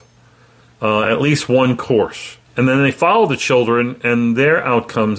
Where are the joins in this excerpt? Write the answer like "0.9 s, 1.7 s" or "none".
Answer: 2.5 s